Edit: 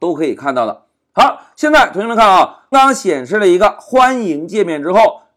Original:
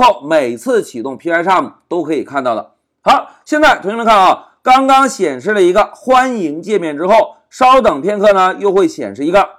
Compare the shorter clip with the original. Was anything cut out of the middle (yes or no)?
yes